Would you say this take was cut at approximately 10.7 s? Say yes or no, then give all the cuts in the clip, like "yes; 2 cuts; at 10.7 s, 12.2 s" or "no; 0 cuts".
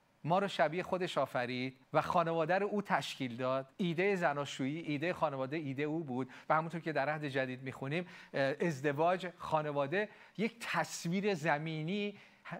no; 2 cuts; at 1.8 s, 3.7 s